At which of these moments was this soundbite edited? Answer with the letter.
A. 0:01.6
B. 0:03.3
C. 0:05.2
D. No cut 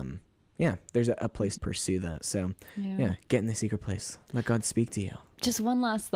A